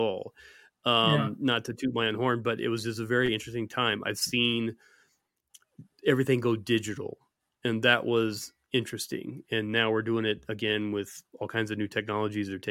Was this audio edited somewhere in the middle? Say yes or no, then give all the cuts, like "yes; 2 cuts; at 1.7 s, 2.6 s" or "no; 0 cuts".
no; 0 cuts